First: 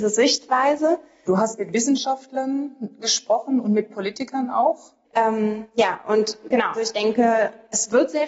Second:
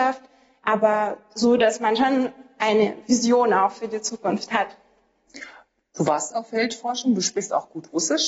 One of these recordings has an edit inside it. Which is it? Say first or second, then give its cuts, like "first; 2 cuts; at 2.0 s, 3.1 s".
first; 3 cuts; at 1.2 s, 5.0 s, 6.7 s